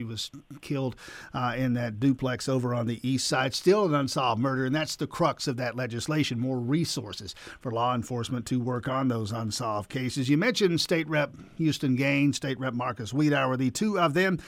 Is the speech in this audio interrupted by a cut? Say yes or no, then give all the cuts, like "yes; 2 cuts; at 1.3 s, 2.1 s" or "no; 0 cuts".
no; 0 cuts